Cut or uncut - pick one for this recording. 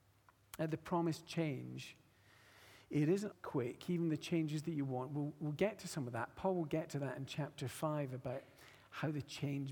cut